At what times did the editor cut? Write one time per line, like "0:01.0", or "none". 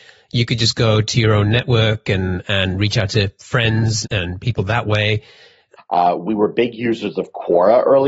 0:04.0
0:05.8